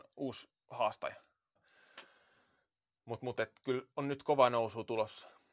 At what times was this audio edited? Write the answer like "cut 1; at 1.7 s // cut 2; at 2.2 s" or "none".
cut 1; at 1.6 s